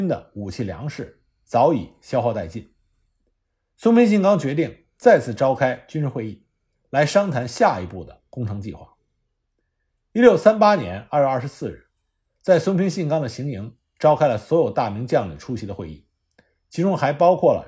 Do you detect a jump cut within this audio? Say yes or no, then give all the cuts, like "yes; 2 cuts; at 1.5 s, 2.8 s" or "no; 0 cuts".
no; 0 cuts